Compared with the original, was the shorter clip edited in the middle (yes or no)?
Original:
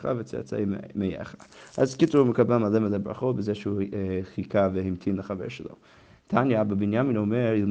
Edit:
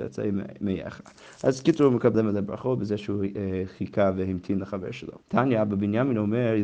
yes